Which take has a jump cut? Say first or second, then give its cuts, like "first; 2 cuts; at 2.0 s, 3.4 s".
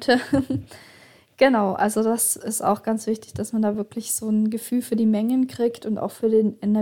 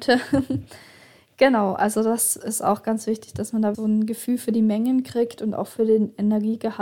second; 1 cut; at 3.7 s